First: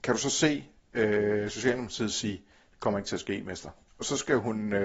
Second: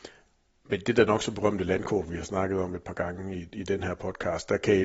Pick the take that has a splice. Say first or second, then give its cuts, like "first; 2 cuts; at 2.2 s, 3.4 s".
first; 1 cut; at 3.9 s